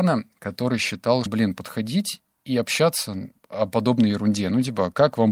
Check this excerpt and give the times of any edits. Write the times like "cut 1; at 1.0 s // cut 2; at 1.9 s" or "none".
cut 1; at 1.3 s // cut 2; at 3.4 s